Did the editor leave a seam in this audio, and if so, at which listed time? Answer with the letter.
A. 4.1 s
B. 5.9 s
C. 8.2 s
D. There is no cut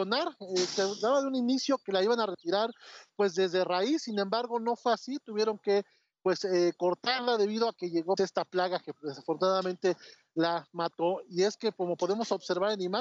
C